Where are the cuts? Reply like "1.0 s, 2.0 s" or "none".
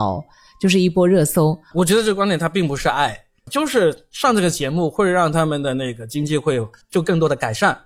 1.7 s, 3.5 s